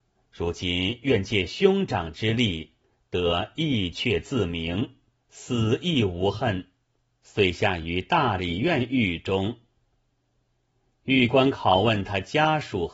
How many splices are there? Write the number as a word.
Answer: one